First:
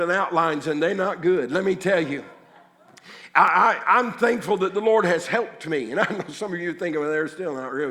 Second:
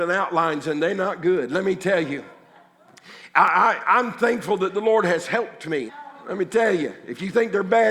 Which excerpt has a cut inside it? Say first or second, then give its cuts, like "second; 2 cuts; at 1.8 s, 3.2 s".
second; 1 cut; at 5.9 s